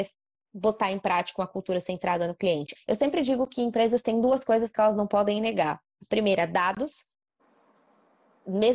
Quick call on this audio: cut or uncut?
cut